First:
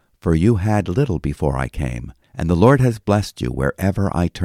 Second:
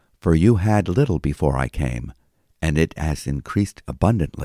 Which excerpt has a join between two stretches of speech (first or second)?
first